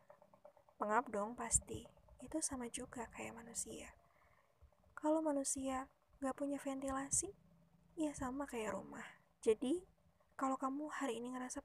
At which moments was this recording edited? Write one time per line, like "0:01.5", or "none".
0:09.3